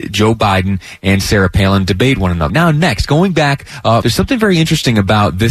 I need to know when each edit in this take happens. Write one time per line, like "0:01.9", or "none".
0:02.5
0:04.0